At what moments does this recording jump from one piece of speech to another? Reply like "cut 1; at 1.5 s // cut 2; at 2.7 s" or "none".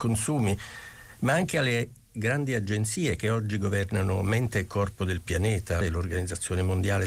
cut 1; at 5.8 s

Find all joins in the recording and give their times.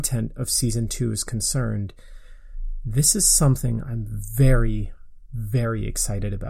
none

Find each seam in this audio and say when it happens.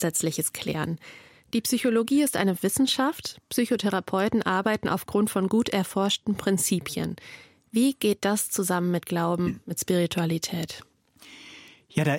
none

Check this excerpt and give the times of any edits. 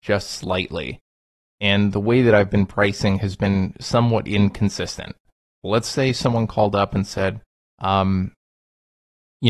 cut 1; at 5.6 s

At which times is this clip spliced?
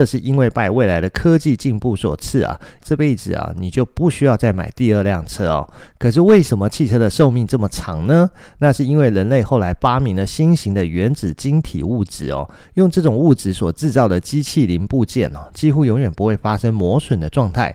cut 1; at 2.8 s

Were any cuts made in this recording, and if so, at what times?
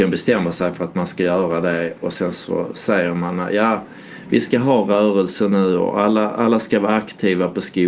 none

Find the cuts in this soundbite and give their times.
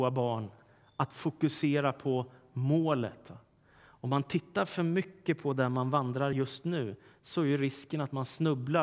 none

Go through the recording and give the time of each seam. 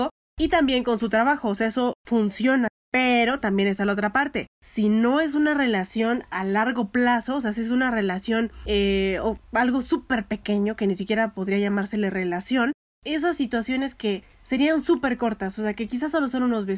none

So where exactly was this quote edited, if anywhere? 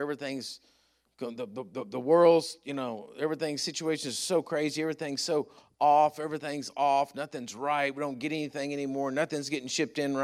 none

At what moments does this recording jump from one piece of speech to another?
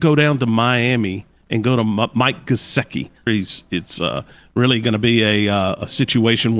cut 1; at 3.3 s

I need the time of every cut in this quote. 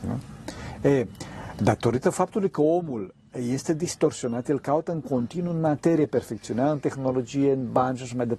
none

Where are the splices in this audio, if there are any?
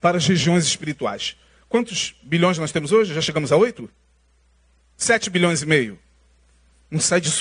none

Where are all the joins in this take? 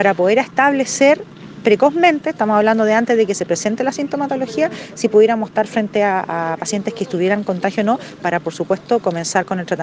none

